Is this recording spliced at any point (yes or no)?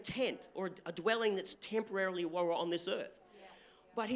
yes